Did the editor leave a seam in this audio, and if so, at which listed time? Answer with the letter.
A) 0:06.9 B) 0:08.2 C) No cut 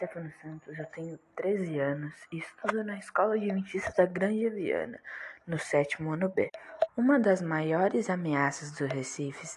A